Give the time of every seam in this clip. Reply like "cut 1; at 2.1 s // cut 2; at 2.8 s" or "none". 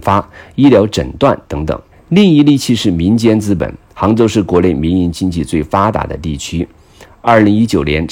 cut 1; at 1.9 s